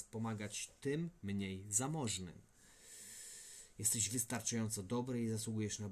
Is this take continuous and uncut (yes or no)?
yes